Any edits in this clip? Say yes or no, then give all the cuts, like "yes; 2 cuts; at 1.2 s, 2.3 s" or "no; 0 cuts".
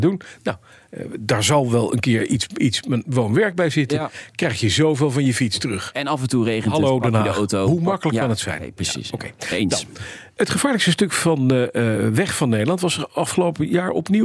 no; 0 cuts